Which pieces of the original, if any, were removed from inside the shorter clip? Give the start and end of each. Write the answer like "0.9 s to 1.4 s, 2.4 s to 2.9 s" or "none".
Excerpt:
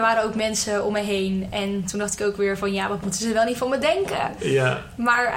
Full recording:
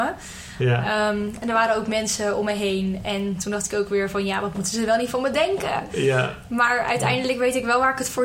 none